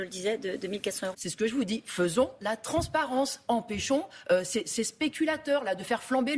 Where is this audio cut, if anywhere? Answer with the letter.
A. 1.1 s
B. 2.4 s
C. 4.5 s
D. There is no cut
A